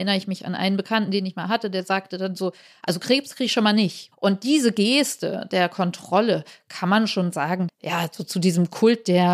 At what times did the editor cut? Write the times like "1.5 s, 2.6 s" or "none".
4.1 s, 7.7 s